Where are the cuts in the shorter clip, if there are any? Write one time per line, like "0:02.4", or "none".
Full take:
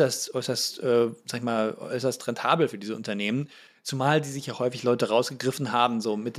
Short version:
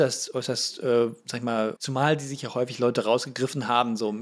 0:01.8